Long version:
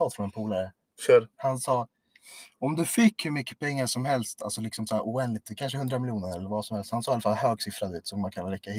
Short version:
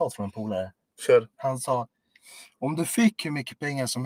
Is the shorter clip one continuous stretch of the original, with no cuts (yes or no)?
yes